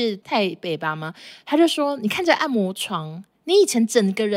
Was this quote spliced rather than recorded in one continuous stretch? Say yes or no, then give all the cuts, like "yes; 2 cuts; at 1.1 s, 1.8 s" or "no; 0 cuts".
no; 0 cuts